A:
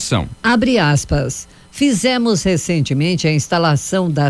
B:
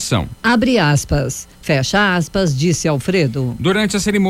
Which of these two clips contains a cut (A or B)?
B